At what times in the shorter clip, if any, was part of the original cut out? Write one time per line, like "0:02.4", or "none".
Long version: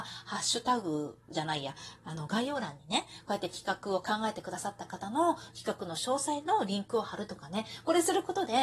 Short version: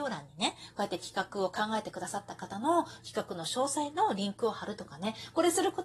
none